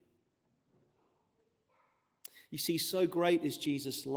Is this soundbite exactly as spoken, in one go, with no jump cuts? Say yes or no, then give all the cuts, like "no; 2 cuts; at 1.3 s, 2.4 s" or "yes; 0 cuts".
yes; 0 cuts